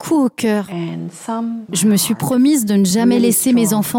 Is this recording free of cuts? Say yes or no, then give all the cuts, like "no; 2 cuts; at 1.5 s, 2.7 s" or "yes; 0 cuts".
no; 1 cut; at 1.7 s